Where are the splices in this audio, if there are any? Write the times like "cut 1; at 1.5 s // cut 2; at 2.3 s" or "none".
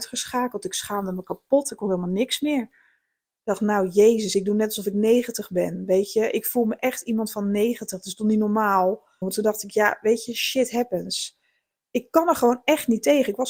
cut 1; at 9.2 s